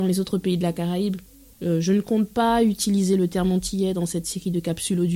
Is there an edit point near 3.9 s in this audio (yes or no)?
no